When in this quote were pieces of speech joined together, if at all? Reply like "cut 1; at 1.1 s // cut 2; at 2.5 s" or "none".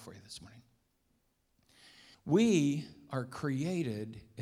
cut 1; at 2.1 s